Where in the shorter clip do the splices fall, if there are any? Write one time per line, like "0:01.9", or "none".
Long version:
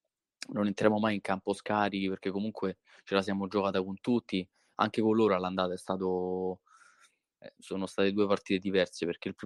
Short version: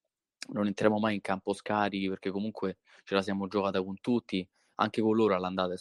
none